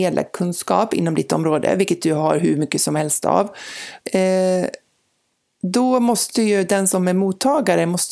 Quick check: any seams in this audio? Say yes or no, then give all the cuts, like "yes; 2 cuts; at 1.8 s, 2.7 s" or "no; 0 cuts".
yes; 1 cut; at 4.0 s